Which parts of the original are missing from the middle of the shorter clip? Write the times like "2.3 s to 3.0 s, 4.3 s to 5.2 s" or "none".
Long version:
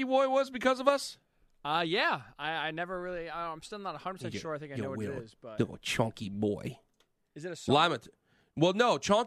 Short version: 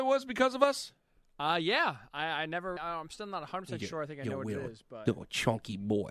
3.0 s to 3.3 s